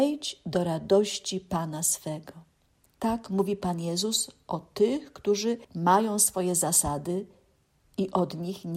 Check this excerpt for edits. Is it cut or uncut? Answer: cut